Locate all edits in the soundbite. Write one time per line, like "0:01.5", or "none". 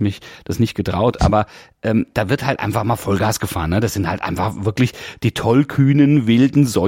none